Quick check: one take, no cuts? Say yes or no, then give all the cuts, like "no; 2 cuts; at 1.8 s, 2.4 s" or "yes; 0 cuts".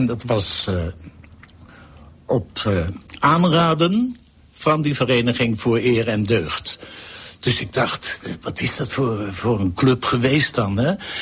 yes; 0 cuts